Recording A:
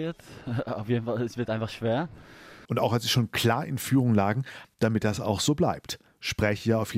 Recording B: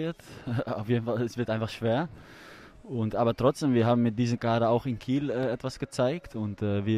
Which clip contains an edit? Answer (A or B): A